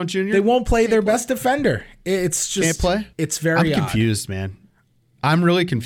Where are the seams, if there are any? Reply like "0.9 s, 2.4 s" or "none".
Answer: 3.1 s